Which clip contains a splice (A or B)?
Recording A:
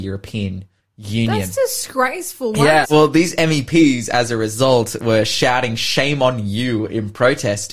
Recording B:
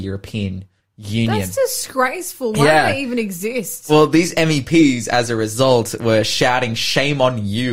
A